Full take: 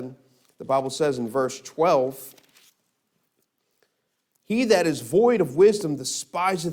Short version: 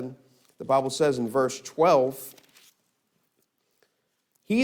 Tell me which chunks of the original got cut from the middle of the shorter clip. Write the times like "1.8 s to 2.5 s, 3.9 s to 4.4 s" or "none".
none